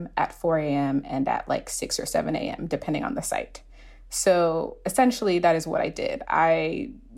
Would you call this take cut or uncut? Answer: uncut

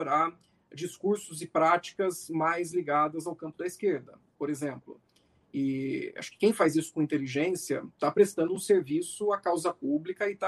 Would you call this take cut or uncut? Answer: uncut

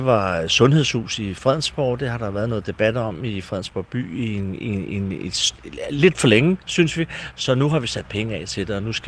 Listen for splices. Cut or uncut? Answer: uncut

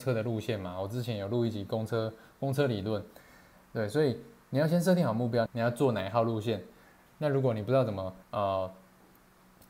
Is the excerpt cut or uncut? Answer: cut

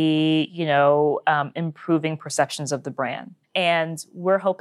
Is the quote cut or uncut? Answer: cut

